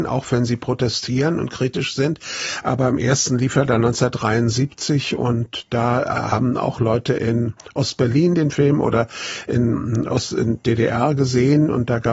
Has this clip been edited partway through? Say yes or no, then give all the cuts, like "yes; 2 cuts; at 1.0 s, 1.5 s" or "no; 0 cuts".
yes; 1 cut; at 2.6 s